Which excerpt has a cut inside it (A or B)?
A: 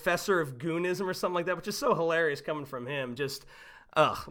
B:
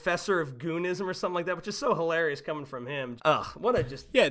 B